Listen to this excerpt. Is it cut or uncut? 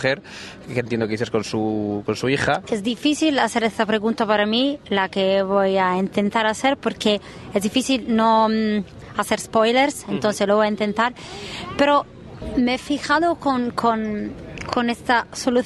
cut